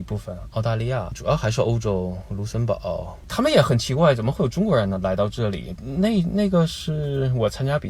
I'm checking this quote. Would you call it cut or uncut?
cut